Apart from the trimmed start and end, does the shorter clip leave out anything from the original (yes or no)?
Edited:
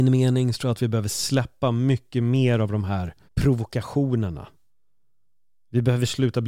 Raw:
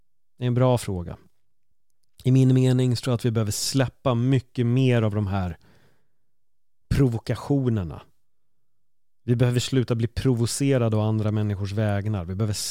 yes